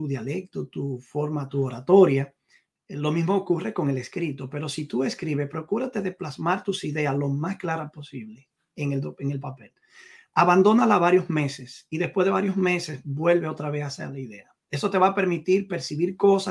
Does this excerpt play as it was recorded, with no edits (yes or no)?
yes